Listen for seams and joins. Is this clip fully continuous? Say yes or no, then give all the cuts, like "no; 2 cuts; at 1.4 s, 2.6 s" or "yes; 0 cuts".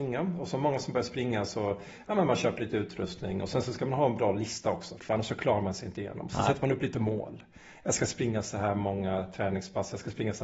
no; 1 cut; at 5.0 s